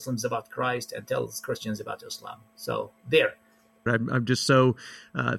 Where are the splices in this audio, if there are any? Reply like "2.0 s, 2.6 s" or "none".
3.9 s